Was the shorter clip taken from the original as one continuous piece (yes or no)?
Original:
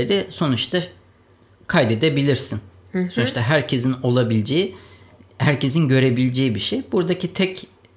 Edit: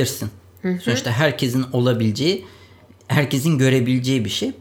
yes